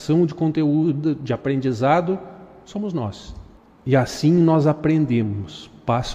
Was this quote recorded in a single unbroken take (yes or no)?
no